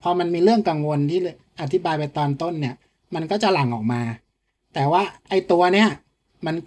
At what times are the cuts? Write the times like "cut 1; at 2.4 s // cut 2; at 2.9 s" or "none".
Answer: none